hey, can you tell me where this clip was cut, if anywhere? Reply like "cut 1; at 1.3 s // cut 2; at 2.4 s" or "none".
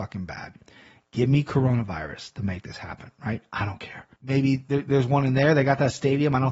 cut 1; at 4.2 s